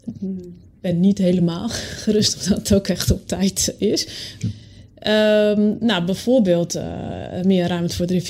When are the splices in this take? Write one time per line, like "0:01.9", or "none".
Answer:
0:04.4